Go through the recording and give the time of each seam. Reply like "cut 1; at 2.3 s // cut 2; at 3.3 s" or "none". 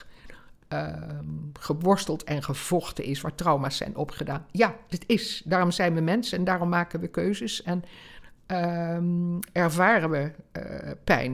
none